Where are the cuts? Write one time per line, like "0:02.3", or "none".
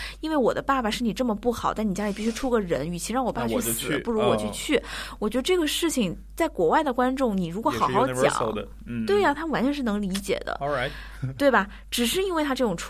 none